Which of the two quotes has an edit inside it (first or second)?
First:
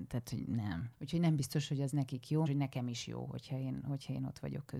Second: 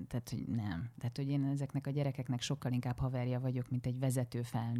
first